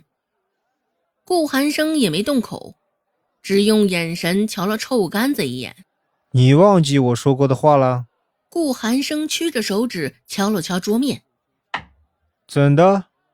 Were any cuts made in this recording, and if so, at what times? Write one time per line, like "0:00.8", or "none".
0:08.3